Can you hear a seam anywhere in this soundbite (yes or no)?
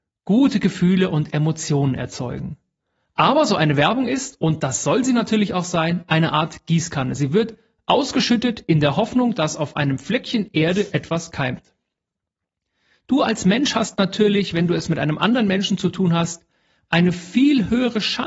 no